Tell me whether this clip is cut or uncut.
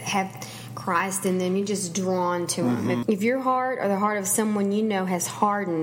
cut